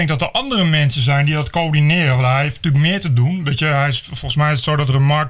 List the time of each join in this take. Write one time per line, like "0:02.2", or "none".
none